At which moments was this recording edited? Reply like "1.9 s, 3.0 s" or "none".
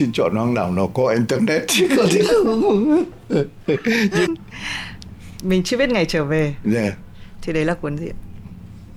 4.3 s, 7.3 s